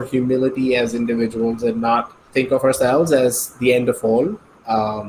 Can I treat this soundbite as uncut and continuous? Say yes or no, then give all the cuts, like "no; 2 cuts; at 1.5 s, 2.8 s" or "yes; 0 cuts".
no; 1 cut; at 2.3 s